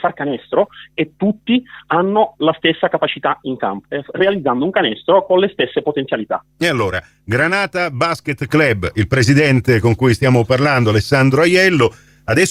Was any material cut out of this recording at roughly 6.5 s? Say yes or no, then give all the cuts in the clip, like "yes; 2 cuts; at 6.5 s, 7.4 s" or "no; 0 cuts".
no; 1 cut; at 3.8 s